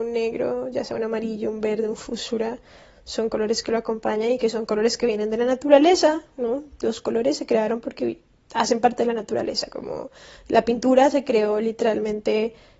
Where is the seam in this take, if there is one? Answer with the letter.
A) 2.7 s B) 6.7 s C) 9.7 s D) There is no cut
D